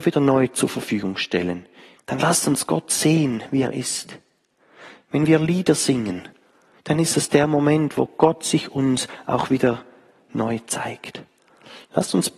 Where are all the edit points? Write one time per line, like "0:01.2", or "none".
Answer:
0:02.0